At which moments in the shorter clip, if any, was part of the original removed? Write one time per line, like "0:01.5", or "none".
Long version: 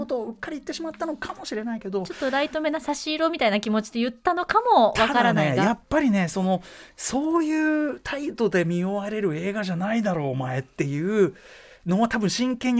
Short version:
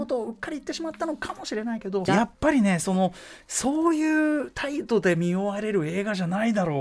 0:02.1